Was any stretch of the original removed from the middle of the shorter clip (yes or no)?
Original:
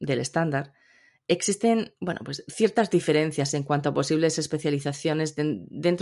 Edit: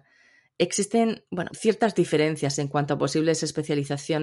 yes